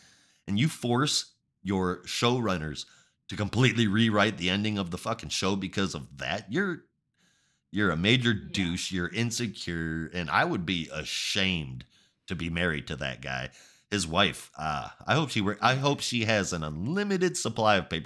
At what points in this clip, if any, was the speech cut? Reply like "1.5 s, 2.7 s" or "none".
none